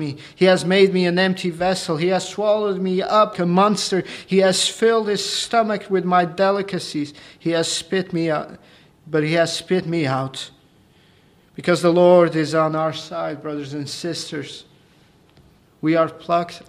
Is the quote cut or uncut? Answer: cut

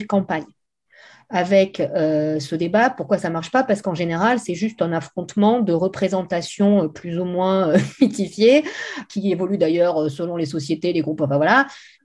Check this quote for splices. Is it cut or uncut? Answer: cut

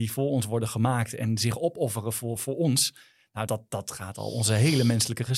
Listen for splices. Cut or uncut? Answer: cut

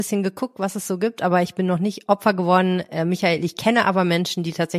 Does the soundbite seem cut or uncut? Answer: uncut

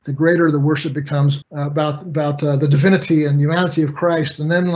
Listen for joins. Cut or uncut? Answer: cut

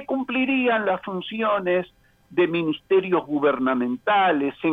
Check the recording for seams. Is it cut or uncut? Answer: uncut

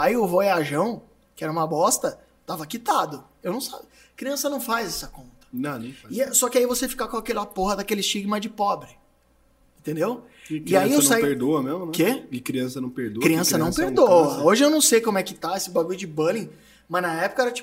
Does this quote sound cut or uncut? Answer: uncut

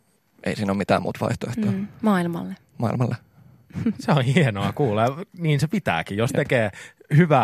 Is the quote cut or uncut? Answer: uncut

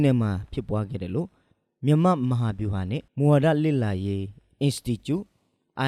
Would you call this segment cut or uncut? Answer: cut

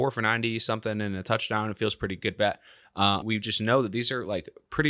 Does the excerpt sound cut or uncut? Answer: cut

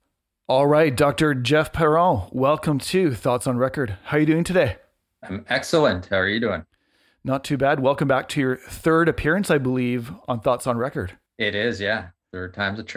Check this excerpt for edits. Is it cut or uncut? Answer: cut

